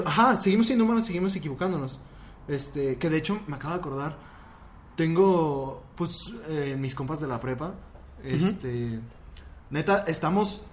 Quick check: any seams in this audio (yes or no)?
no